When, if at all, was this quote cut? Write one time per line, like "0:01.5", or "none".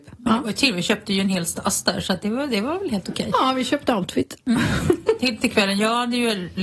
none